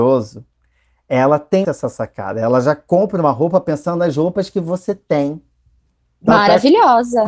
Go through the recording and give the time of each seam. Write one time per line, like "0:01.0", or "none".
0:01.6